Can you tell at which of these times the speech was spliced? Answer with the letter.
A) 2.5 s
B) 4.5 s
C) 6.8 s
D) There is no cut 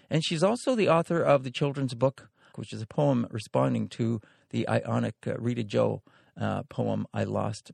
A